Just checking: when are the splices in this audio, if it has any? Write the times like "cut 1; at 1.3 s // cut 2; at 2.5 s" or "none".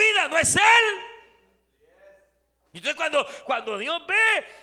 none